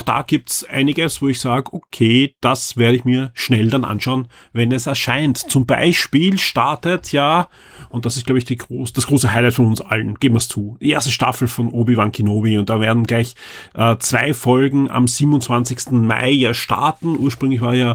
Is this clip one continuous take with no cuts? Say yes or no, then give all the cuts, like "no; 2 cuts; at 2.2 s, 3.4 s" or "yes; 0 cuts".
yes; 0 cuts